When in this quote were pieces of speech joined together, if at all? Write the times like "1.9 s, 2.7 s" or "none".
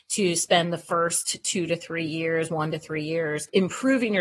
none